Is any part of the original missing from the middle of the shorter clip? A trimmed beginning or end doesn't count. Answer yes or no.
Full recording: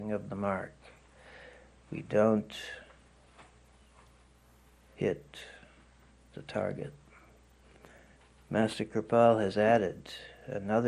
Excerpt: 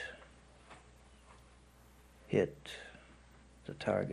no